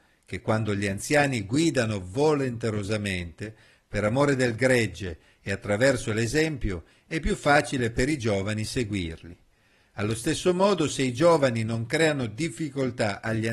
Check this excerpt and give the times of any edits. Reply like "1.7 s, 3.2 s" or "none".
none